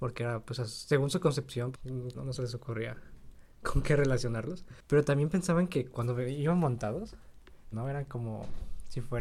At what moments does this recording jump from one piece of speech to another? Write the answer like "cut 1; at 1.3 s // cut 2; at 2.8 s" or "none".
cut 1; at 2.1 s // cut 2; at 7.7 s